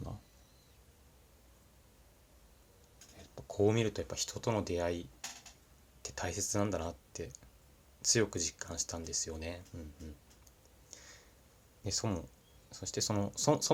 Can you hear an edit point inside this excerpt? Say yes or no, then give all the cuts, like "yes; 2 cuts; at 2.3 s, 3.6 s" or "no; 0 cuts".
no; 0 cuts